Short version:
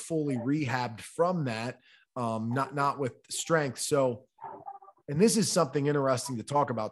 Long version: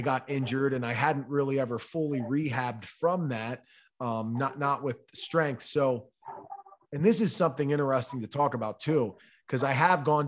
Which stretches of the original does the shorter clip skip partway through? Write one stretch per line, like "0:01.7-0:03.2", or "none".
none